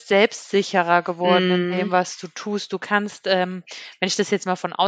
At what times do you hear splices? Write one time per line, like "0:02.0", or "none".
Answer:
none